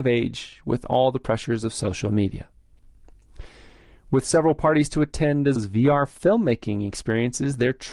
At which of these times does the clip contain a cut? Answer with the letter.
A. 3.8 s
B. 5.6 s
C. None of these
B